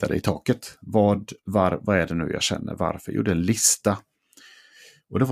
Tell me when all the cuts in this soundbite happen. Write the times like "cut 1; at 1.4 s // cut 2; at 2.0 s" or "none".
none